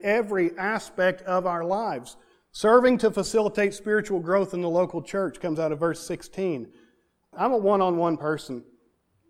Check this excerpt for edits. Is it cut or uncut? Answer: cut